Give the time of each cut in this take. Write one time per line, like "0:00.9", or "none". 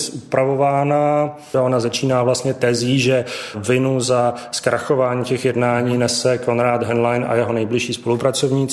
0:01.5